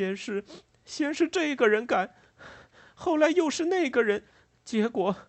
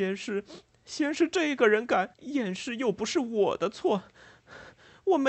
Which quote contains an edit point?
second; 1 cut; at 2.1 s

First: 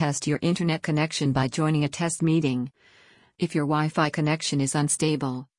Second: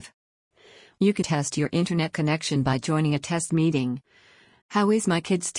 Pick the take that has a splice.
second; 2 cuts; at 1.2 s, 4.6 s

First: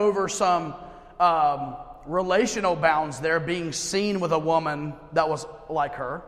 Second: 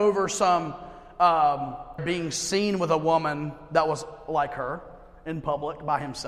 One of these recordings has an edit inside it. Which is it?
second; 1 cut; at 2.0 s

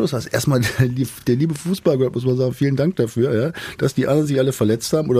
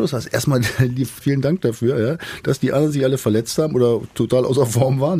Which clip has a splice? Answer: second; 1 cut; at 1.2 s

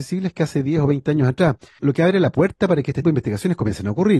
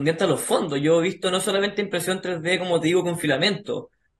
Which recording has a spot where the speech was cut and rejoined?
first; 2 cuts; at 1.8 s, 3.0 s

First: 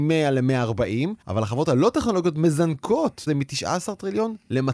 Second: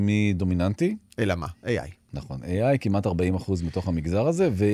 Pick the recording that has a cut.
first; 2 cuts; at 1.2 s, 3.3 s

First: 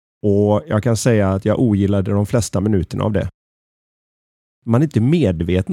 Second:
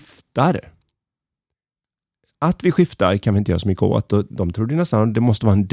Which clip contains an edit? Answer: second; 1 cut; at 4.1 s

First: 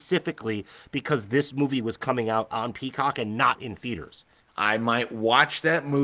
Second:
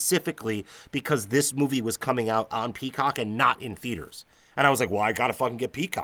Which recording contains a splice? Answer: first; 1 cut; at 4.4 s

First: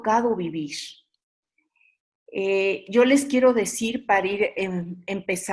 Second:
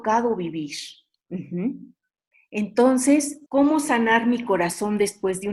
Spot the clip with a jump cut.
second; 2 cuts; at 1.2 s, 3.5 s

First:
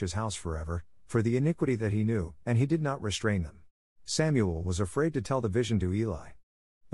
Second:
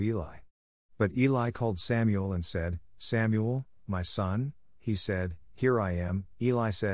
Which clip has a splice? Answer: first; 2 cuts; at 2.4 s, 3.9 s

